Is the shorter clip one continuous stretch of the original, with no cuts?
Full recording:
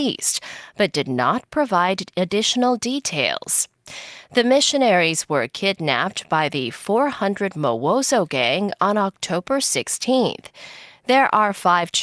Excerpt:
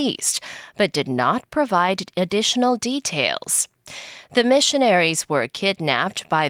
yes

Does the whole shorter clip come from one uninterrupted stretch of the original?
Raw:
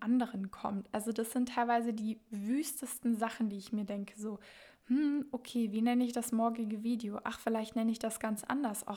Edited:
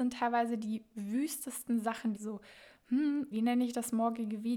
no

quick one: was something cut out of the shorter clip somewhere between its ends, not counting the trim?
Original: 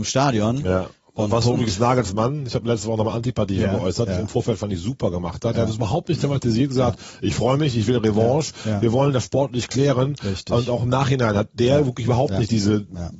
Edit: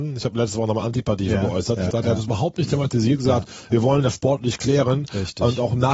yes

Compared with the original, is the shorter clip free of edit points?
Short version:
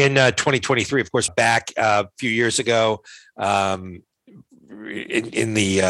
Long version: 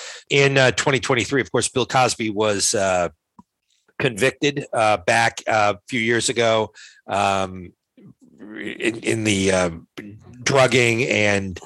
no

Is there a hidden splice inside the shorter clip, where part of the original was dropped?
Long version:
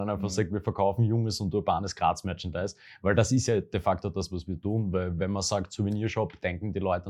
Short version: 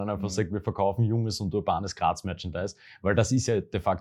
no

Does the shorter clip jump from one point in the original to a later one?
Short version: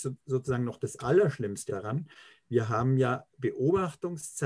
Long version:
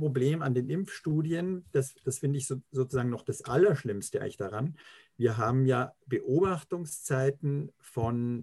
yes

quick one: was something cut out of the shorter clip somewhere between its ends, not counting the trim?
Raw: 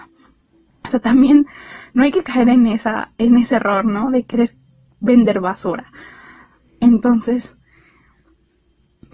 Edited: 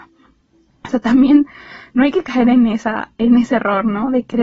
no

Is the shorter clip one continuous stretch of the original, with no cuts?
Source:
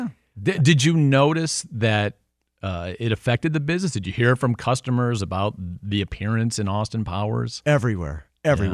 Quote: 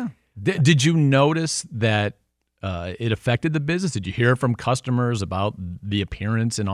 yes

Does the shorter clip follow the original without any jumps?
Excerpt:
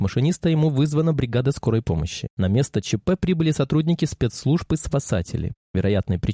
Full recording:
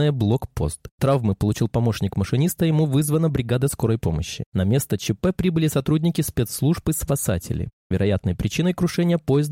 yes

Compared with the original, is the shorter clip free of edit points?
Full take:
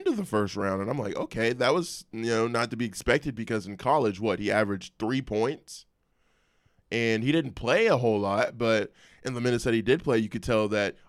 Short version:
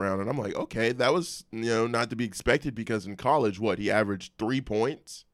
yes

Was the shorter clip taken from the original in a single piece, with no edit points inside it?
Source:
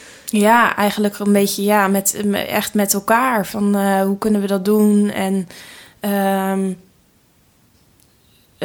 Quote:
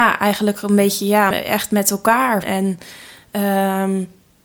no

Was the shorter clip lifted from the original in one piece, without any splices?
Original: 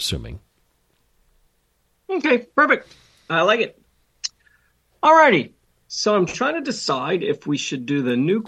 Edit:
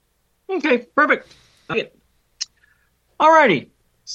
no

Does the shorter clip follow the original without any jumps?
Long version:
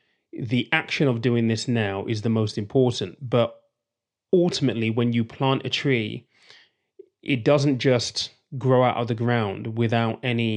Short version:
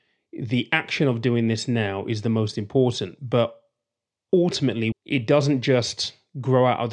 no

